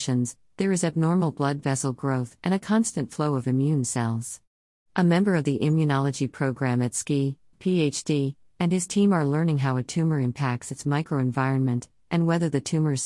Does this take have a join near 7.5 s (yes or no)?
yes